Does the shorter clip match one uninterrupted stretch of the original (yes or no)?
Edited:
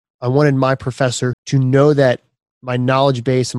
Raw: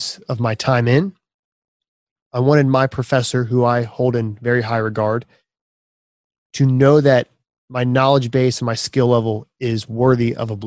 no